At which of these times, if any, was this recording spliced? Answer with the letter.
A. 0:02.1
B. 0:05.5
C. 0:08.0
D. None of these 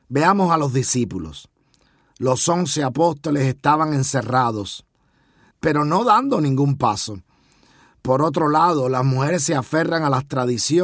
B